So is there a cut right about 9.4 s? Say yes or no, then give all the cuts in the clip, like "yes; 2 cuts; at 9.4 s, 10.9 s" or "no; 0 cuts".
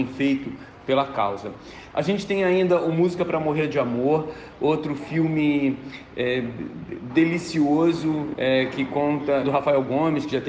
yes; 2 cuts; at 1.9 s, 9.4 s